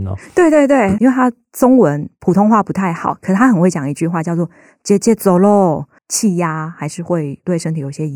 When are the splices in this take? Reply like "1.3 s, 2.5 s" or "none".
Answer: 1.0 s, 6.0 s